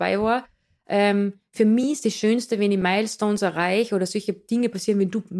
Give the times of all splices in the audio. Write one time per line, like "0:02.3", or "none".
none